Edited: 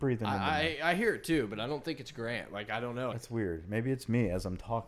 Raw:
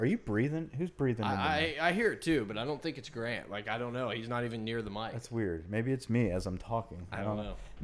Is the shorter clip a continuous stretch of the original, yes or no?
no